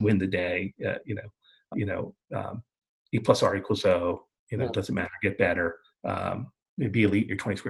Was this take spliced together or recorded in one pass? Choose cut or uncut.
cut